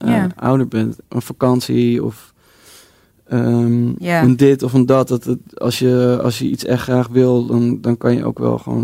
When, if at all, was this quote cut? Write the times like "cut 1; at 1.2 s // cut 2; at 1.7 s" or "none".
none